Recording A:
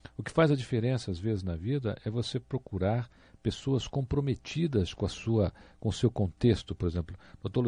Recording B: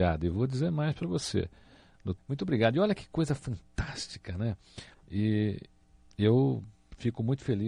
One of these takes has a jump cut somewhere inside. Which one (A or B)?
B